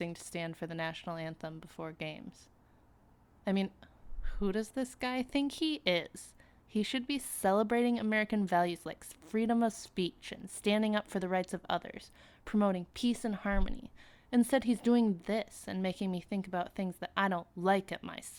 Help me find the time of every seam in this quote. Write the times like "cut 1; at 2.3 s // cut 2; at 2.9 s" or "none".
none